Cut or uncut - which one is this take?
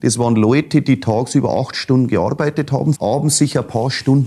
cut